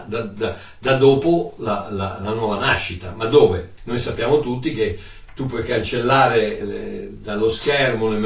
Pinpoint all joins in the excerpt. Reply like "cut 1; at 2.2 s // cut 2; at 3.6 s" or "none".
cut 1; at 3.8 s // cut 2; at 6.6 s